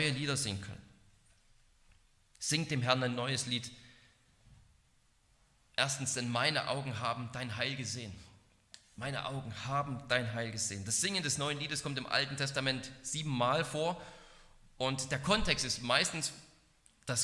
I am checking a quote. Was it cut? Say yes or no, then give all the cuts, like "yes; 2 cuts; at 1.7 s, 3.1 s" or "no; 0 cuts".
no; 0 cuts